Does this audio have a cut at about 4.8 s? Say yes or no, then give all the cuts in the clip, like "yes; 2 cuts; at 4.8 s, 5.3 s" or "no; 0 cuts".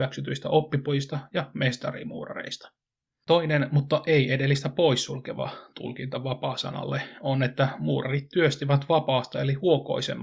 no; 1 cut; at 3.2 s